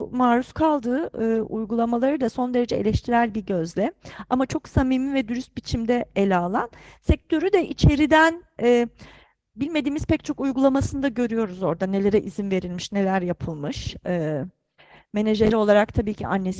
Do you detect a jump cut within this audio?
no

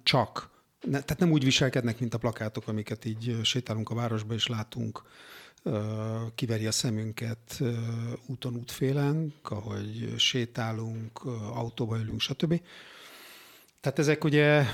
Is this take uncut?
no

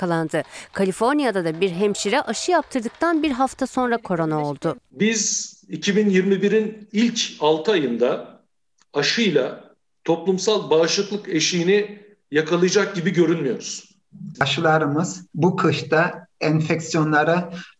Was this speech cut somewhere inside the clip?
yes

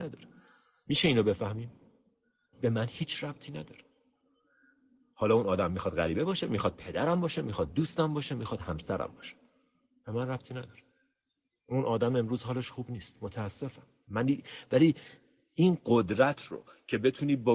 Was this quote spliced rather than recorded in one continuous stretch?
yes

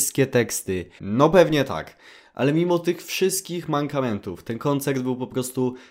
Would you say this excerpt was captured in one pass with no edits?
no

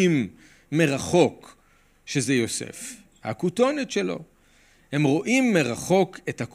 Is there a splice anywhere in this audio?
no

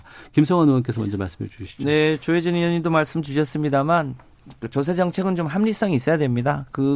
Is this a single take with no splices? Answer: yes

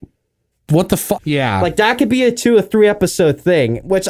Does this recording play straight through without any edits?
no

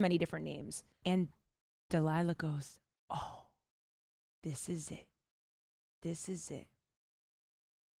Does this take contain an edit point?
yes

